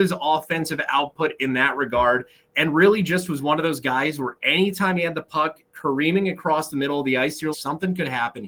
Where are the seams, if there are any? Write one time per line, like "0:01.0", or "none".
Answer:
0:07.5